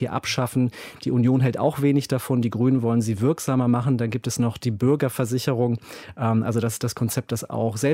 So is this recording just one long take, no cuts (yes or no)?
yes